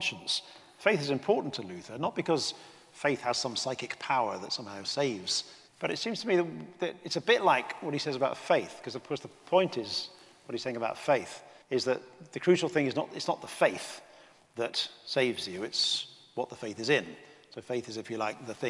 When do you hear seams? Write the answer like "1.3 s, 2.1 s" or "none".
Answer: 5.7 s, 11.6 s